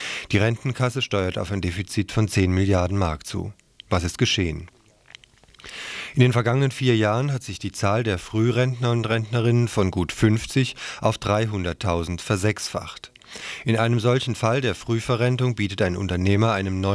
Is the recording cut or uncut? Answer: uncut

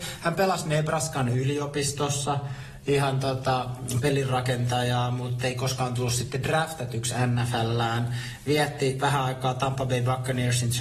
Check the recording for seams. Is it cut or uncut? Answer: uncut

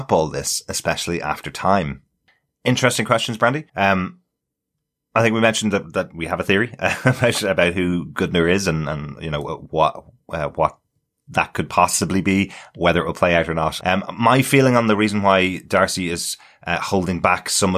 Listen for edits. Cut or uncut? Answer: cut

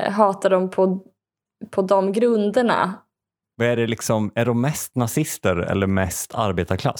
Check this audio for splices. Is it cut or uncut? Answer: cut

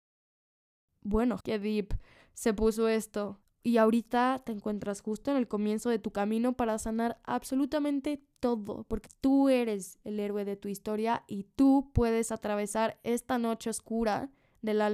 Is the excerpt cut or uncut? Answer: cut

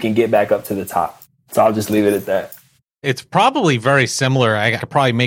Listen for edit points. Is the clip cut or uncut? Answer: uncut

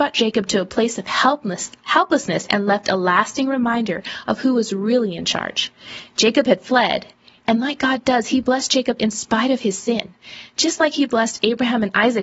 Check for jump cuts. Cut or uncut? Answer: uncut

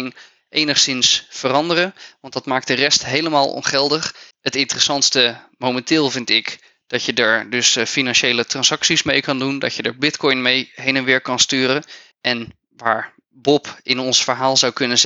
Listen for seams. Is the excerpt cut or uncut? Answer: cut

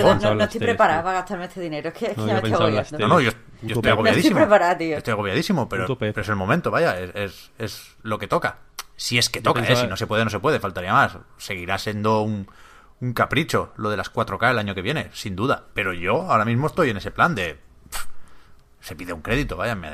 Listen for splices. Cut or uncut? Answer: uncut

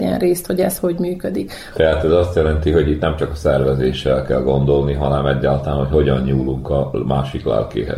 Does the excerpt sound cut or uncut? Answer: uncut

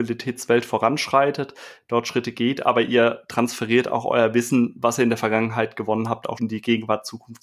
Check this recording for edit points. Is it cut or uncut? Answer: cut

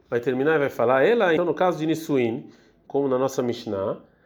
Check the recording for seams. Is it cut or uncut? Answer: cut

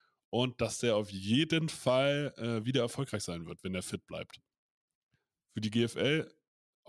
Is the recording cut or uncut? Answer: uncut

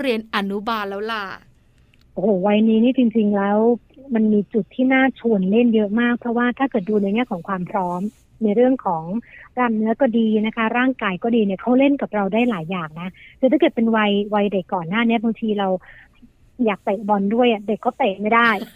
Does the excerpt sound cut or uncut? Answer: cut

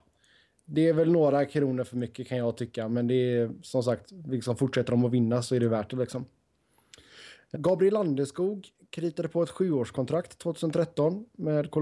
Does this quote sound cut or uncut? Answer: cut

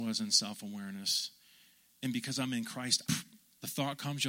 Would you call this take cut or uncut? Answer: cut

